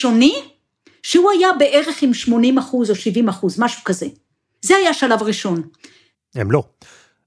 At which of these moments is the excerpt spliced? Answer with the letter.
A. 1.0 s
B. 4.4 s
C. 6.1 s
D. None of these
C